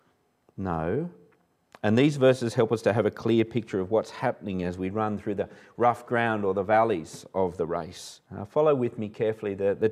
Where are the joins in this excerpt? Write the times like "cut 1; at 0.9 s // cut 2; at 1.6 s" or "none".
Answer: cut 1; at 8.3 s